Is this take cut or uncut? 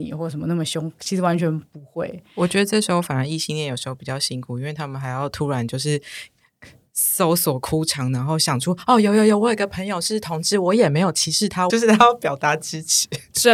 cut